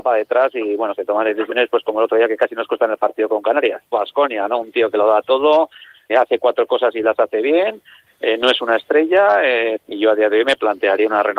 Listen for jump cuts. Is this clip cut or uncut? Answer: cut